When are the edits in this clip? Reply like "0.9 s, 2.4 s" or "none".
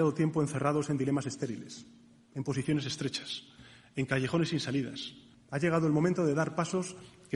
5.3 s